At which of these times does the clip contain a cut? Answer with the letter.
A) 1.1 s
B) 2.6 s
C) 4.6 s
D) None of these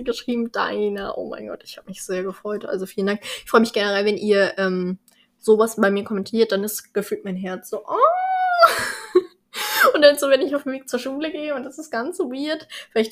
D